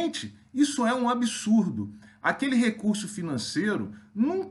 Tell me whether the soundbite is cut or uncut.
uncut